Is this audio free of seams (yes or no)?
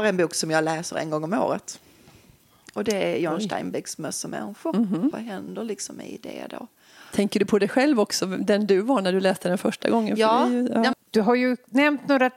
no